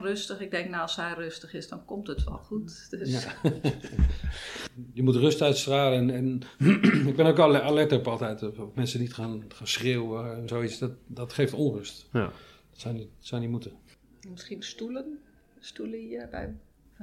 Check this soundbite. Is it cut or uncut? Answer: cut